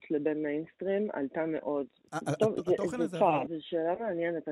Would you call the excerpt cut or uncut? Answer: cut